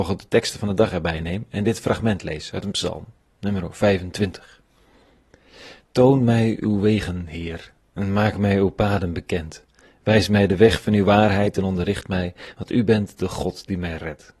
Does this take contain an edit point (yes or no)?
no